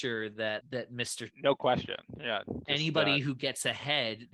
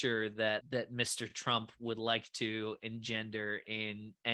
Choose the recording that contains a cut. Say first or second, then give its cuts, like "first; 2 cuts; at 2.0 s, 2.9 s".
first; 1 cut; at 1.3 s